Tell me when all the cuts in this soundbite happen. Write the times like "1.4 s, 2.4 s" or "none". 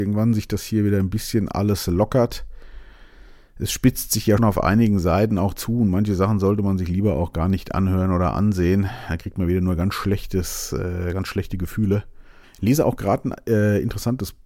4.4 s, 12.4 s